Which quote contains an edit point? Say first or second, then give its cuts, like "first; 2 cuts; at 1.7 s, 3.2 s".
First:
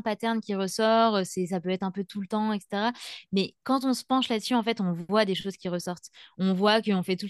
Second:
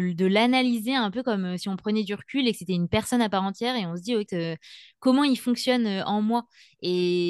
second; 1 cut; at 4.3 s